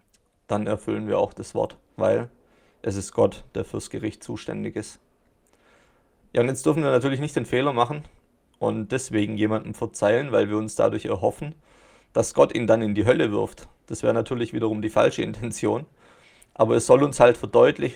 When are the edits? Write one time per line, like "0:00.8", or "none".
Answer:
0:02.0